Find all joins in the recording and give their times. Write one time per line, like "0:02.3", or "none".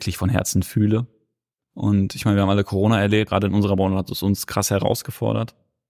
0:01.6
0:03.3